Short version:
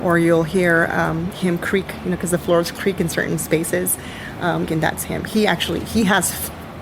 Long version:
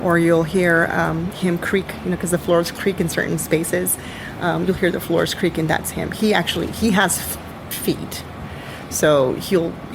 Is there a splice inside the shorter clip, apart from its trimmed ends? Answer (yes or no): yes